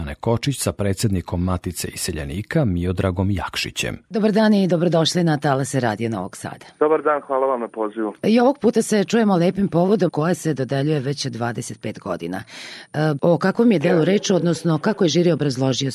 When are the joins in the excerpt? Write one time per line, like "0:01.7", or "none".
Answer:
0:04.0
0:10.1
0:13.2

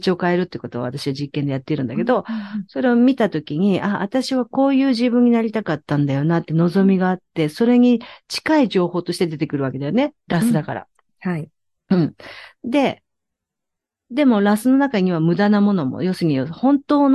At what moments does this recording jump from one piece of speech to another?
none

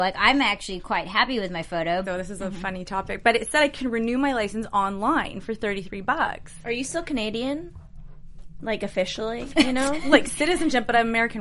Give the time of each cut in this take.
0:02.0

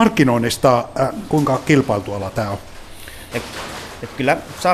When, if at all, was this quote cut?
0:01.3
0:03.3

